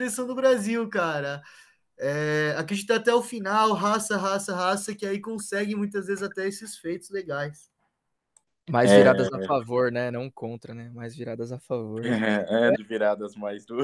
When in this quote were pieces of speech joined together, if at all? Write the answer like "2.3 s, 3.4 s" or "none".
12.7 s